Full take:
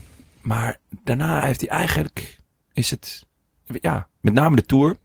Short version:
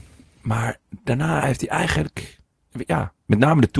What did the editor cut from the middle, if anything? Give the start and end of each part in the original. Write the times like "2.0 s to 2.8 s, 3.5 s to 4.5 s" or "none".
2.6 s to 3.5 s